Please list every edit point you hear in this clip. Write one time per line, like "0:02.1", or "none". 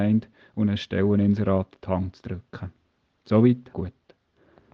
0:03.7